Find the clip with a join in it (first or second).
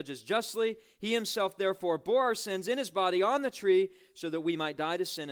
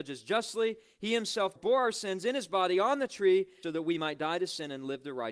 second